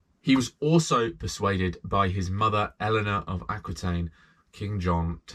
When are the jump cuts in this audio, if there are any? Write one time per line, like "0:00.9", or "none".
0:04.4